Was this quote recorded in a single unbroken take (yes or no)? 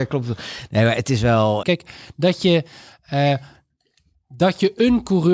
no